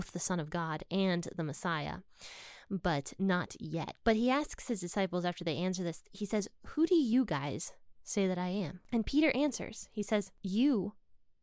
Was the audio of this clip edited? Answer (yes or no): no